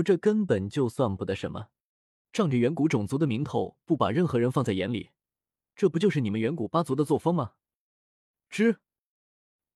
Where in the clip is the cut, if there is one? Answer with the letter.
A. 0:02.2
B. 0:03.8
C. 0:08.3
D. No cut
A